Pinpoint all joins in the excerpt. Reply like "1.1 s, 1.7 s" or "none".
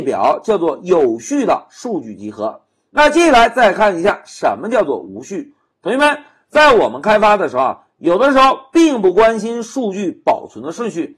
none